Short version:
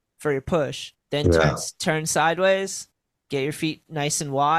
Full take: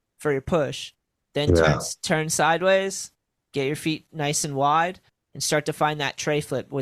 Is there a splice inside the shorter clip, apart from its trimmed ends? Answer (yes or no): yes